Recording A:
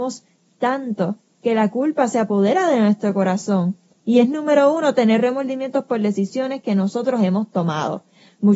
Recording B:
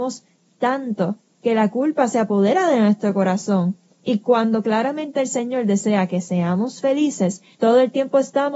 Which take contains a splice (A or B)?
A